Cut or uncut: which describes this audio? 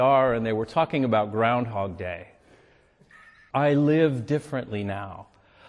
cut